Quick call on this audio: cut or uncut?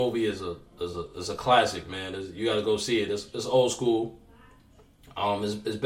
uncut